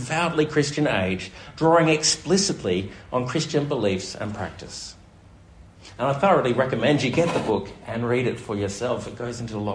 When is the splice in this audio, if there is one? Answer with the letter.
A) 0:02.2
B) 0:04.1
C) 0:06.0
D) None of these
D